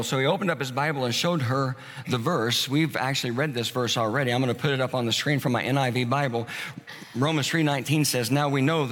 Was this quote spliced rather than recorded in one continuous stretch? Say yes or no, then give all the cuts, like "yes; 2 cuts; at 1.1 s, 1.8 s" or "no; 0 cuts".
no; 0 cuts